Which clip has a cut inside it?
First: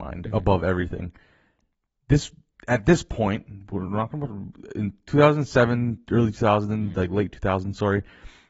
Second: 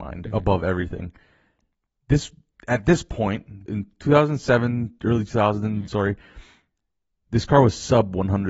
second; 2 cuts; at 3.7 s, 5.9 s

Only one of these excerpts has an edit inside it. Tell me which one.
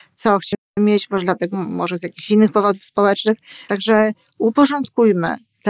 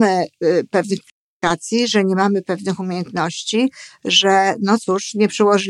first; 2 cuts; at 1.5 s, 3.7 s

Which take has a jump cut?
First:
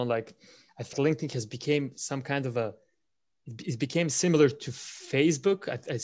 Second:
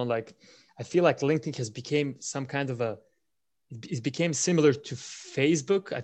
first; 1 cut; at 0.9 s

